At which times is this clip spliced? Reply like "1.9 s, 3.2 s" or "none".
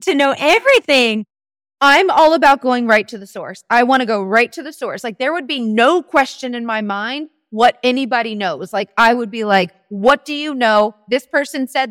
none